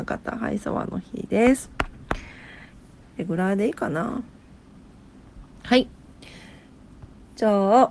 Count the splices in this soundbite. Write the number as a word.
zero